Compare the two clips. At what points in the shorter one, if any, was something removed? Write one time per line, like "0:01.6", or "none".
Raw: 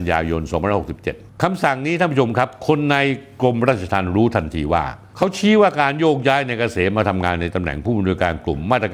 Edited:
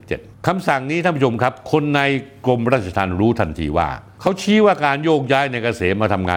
none